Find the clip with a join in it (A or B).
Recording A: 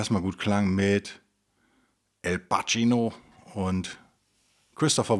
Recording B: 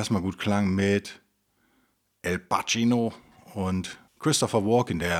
B